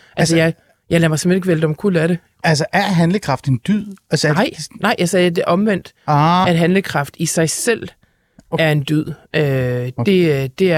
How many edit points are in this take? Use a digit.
1